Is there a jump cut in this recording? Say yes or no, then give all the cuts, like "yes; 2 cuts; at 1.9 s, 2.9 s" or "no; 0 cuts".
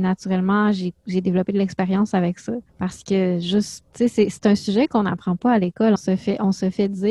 yes; 3 cuts; at 2.7 s, 3.9 s, 6.0 s